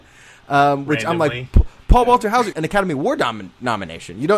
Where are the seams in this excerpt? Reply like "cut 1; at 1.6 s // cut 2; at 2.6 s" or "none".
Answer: cut 1; at 2.5 s